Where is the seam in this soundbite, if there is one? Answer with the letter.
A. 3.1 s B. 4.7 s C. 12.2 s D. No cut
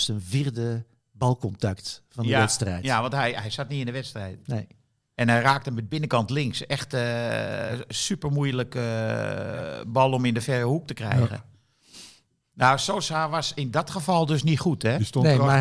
D